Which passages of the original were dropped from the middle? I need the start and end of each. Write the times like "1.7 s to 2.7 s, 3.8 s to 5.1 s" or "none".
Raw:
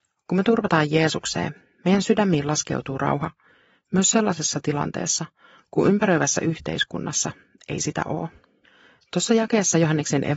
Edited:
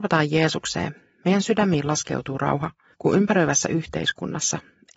3.5 s to 5.7 s